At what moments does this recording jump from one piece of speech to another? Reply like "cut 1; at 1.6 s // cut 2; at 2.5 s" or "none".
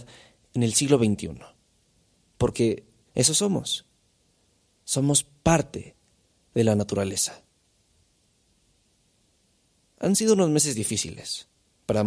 cut 1; at 3.1 s

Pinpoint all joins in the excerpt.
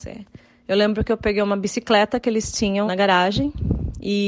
cut 1; at 2.9 s

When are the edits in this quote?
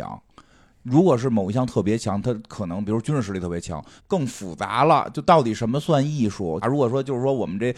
cut 1; at 4.0 s // cut 2; at 6.6 s

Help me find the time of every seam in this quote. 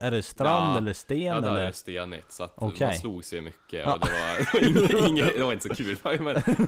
none

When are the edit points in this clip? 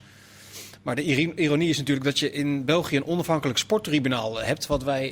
none

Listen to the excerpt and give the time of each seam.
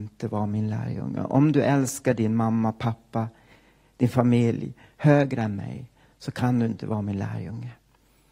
none

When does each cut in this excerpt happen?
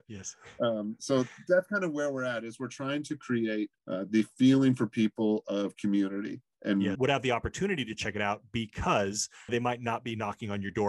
cut 1; at 3.8 s // cut 2; at 6.9 s // cut 3; at 9.5 s

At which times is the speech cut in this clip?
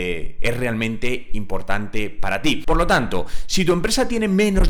cut 1; at 2.6 s

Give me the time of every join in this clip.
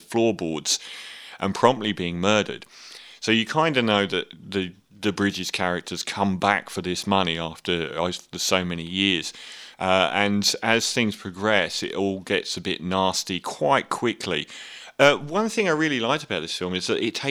cut 1; at 9.7 s

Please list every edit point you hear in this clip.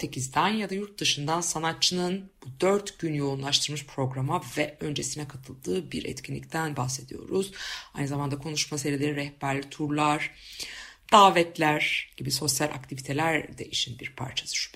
none

